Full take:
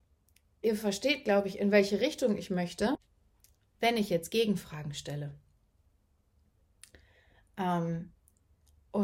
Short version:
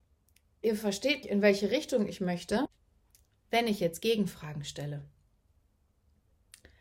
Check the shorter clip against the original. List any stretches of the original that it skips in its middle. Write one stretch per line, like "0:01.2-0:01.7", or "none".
0:01.2-0:01.5